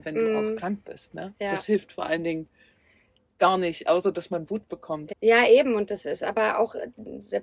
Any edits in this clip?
yes; 1 cut; at 5.1 s

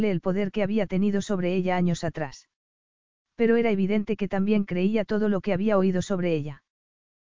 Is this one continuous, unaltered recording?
yes; 0 cuts

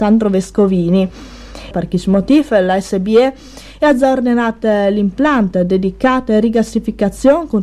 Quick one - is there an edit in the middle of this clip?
yes; 1 cut; at 1.7 s

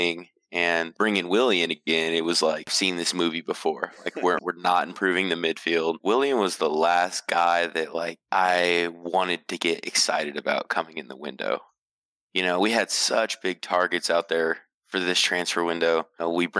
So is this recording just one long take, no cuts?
no; 2 cuts; at 4.4 s, 6.0 s

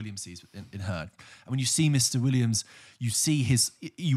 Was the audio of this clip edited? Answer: no; 0 cuts

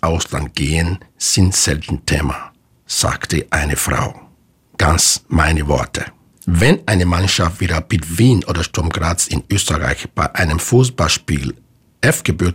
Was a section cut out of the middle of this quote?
no; 0 cuts

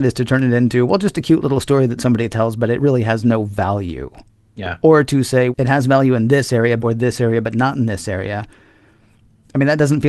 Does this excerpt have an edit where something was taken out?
yes; 2 cuts; at 5.5 s, 6.8 s

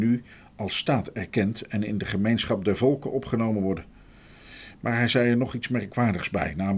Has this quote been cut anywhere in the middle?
no; 0 cuts

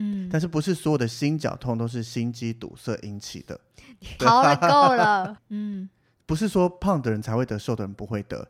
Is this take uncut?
no; 2 cuts; at 4.2 s, 5.4 s

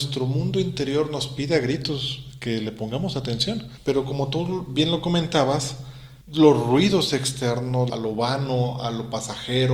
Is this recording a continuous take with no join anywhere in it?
no; 3 cuts; at 3.8 s, 6.2 s, 7.9 s

